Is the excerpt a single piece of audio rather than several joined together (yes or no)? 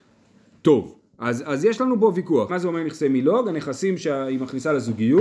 no